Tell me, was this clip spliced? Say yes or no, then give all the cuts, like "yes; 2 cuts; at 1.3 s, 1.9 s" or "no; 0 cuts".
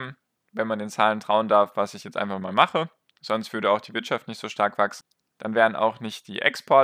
no; 0 cuts